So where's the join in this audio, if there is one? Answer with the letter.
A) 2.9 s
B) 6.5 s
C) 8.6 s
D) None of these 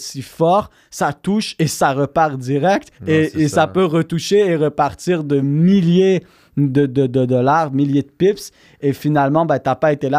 A